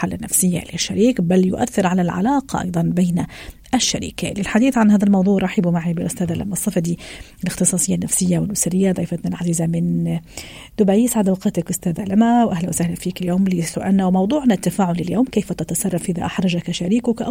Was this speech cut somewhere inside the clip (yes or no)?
no